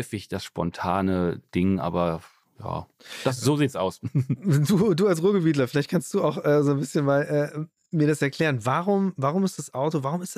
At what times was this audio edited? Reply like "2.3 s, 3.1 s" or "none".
none